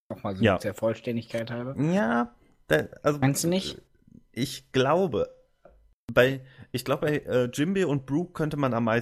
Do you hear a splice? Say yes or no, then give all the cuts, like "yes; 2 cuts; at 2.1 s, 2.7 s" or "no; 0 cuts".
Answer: no; 0 cuts